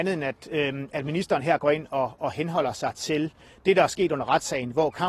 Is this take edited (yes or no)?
no